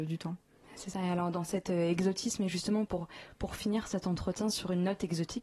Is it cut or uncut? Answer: cut